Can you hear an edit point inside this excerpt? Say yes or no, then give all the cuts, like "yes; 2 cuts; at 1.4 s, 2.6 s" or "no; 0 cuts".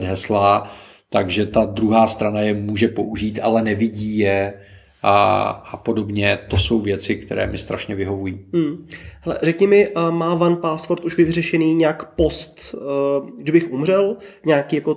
no; 0 cuts